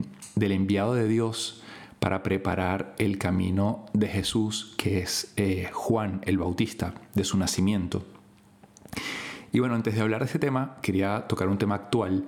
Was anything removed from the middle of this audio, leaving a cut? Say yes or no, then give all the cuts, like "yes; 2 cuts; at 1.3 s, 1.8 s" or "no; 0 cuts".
no; 0 cuts